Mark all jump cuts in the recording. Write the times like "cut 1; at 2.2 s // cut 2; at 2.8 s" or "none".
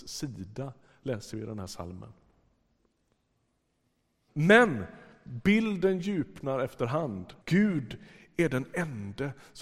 cut 1; at 4.3 s // cut 2; at 7.4 s